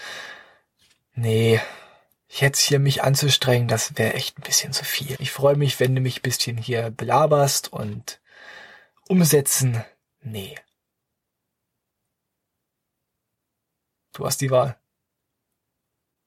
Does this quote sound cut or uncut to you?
cut